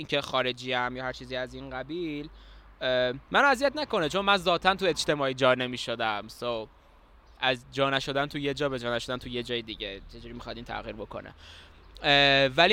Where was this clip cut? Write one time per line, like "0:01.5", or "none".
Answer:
none

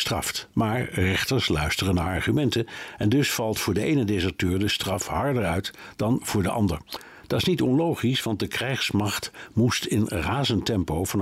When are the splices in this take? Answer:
none

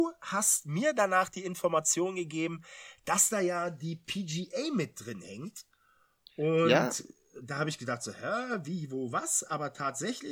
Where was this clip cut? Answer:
none

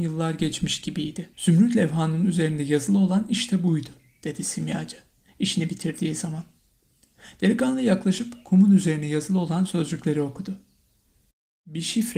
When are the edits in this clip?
0:01.3

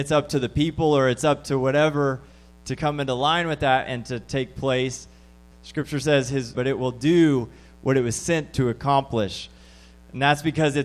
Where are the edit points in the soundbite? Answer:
0:05.5
0:06.5

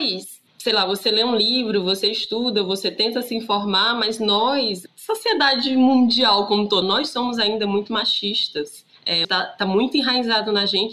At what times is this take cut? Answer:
0:06.8
0:09.2

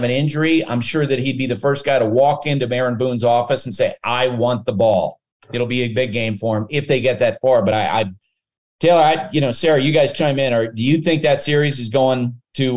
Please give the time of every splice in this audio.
none

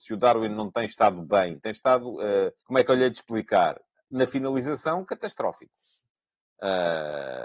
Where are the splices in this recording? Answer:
0:02.6

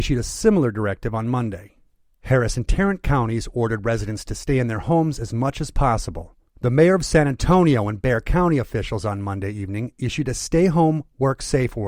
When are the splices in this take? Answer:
0:06.5

